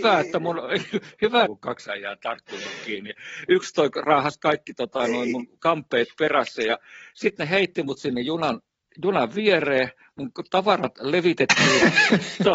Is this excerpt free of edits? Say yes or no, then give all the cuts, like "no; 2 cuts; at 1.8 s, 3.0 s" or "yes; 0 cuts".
no; 1 cut; at 1.5 s